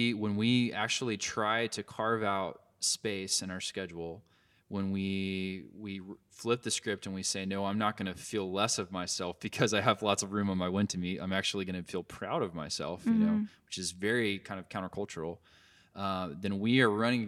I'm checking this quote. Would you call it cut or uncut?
uncut